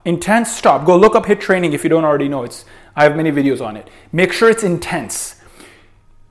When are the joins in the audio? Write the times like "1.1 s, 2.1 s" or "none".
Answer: none